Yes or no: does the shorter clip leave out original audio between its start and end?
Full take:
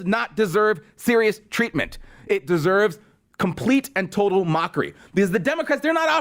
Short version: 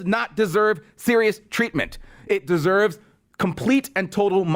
no